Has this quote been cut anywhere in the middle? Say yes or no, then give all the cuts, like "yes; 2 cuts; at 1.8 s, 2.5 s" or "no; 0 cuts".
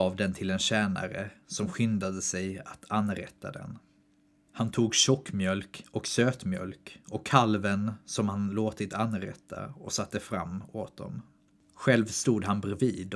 no; 0 cuts